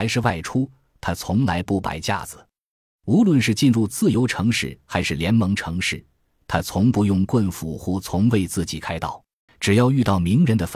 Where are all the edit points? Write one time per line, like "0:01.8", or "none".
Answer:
0:09.5